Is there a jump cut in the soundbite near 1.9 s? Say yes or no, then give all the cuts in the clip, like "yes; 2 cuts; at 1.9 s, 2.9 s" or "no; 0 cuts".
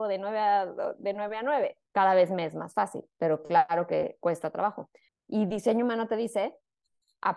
yes; 2 cuts; at 1.9 s, 5.1 s